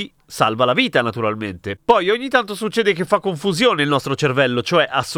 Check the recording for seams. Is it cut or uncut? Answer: uncut